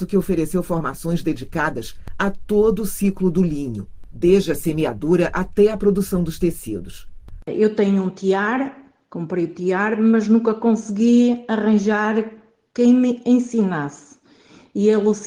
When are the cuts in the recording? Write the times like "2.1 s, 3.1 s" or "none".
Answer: 7.4 s